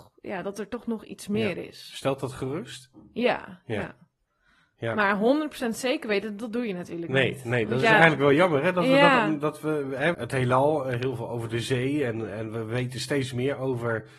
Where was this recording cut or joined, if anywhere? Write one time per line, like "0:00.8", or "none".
0:10.1